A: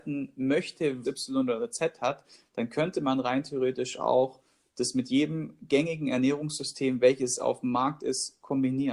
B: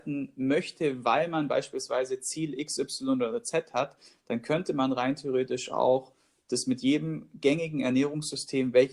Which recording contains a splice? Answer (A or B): A